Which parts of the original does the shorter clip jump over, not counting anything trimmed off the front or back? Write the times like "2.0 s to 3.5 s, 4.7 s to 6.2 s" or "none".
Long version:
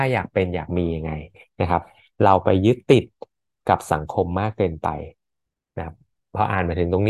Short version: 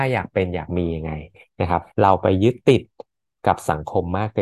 1.9 s to 2.1 s